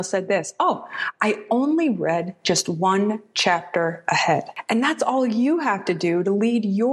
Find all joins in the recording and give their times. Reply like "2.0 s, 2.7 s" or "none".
none